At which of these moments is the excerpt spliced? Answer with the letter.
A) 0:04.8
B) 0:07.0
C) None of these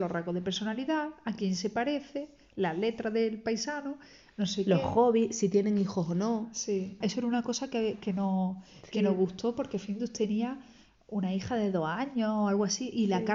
B